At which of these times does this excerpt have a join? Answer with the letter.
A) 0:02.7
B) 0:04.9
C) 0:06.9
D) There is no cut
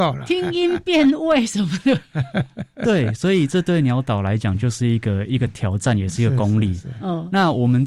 D